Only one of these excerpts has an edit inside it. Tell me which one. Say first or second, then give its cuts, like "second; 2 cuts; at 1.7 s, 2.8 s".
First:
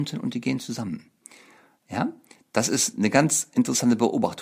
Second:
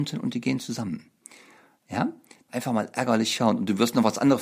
second; 1 cut; at 2.5 s